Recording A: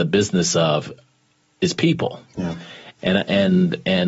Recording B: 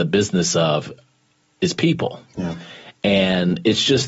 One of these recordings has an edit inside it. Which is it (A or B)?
A